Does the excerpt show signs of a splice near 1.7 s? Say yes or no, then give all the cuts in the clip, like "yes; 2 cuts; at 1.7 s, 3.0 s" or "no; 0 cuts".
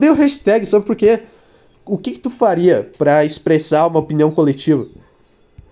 yes; 1 cut; at 1.7 s